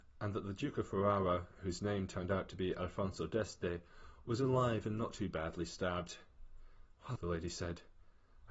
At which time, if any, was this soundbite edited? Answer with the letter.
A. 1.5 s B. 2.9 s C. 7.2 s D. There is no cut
C